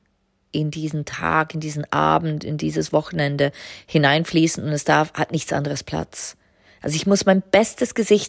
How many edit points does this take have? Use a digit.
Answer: 0